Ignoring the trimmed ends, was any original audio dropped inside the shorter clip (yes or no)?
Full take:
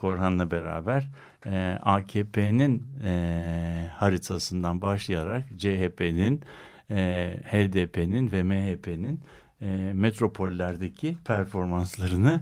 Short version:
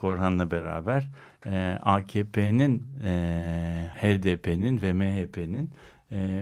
yes